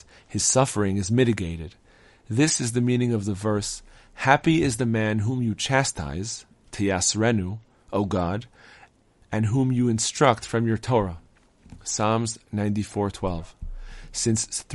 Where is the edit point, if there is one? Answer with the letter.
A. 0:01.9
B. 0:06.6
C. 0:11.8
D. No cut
D